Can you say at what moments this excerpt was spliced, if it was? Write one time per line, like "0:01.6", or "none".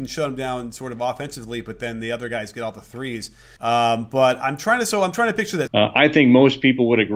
0:03.6
0:05.7

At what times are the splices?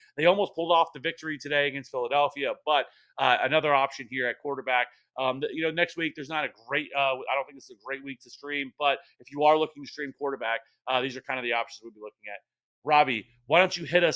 none

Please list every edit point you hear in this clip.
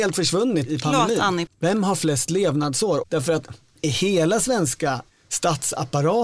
0:01.5
0:03.0

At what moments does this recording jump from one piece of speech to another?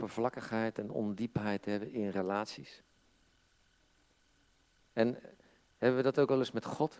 none

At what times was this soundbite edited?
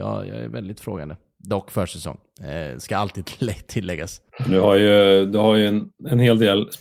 none

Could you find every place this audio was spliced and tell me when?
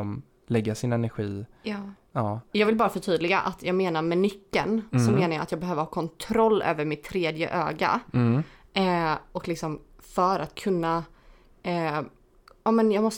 none

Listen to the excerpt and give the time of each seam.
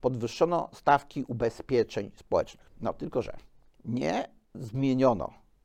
0:02.7

